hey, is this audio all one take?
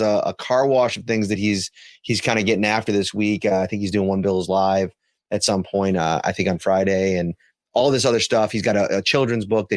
yes; 0 cuts

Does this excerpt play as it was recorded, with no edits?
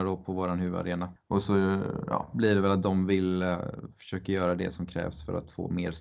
no; 1 cut; at 1.2 s

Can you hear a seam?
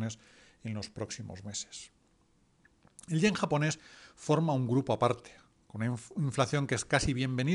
no; 0 cuts

